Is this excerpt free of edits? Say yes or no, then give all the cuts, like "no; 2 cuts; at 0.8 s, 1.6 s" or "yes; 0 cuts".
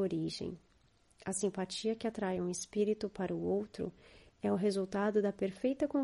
yes; 0 cuts